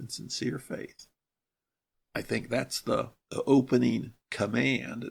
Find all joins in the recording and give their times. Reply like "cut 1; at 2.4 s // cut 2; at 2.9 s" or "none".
none

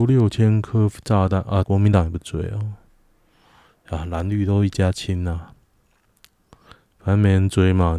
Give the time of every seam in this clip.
cut 1; at 1.6 s

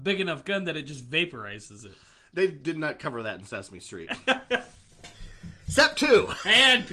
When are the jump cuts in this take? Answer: none

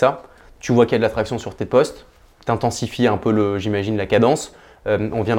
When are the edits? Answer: none

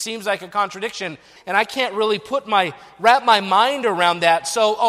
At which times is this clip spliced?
cut 1; at 1.4 s

